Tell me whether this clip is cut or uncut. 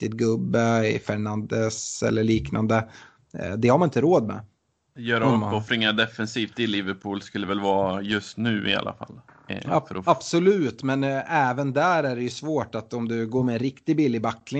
uncut